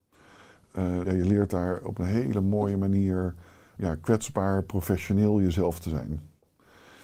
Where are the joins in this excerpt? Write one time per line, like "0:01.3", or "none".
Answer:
0:01.0
0:03.8